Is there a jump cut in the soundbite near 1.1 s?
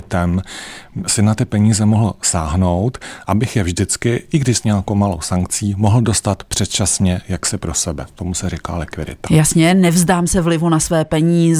no; 0 cuts

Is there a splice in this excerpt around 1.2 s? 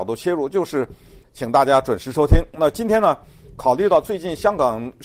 yes; 1 cut; at 1.2 s

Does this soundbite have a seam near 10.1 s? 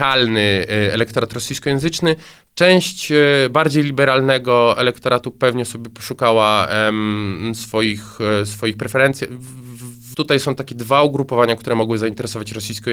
yes; 1 cut; at 10.1 s

